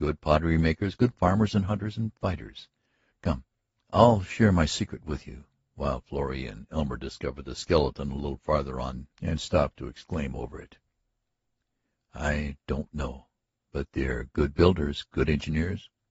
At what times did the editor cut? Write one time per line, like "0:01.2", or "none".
0:03.1
0:12.0